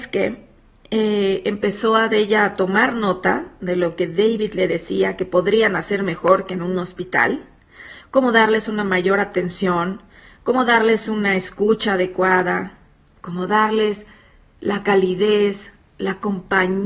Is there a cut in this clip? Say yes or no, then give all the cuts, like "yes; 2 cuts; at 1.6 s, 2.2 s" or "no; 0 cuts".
no; 0 cuts